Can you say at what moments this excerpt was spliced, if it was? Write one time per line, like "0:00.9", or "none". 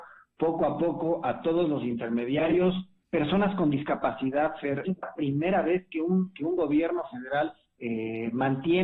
0:03.0
0:04.8
0:07.8